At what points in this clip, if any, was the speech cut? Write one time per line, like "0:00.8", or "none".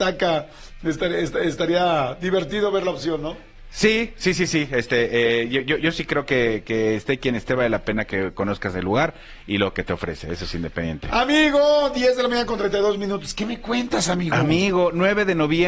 none